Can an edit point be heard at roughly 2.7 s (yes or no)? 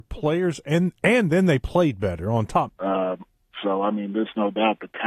yes